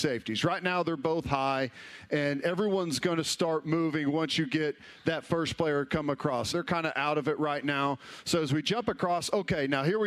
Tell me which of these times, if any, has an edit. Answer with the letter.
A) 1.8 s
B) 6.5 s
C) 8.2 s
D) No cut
B